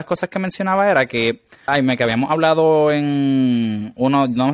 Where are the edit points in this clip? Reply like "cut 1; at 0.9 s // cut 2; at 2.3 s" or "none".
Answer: cut 1; at 1.7 s